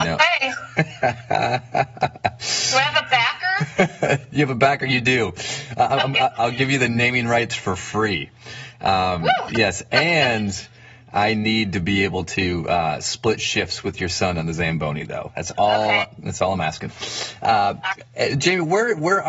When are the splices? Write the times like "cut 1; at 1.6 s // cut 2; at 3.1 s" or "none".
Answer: cut 1; at 9.5 s